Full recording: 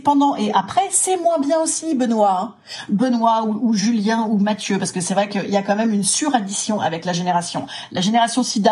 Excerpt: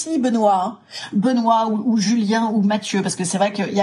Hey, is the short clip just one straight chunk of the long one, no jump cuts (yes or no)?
yes